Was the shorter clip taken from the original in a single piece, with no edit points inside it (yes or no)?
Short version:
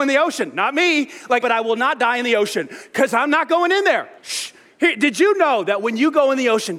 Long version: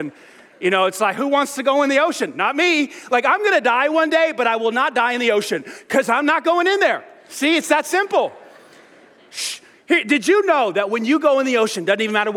no